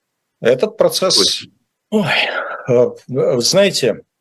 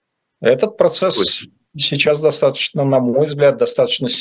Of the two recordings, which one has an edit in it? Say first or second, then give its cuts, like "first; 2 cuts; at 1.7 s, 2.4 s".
first; 1 cut; at 1.7 s